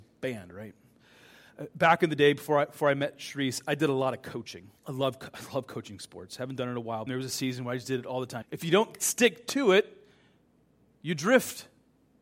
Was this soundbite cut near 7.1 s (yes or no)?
yes